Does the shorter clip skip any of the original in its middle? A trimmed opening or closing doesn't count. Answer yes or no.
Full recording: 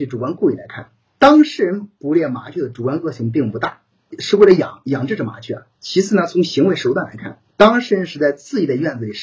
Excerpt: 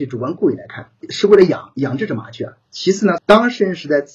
yes